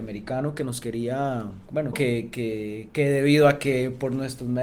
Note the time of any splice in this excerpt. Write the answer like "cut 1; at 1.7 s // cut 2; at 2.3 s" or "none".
cut 1; at 1.9 s